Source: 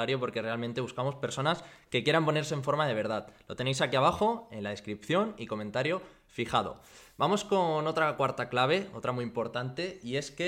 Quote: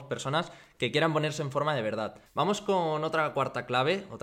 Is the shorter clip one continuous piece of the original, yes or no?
no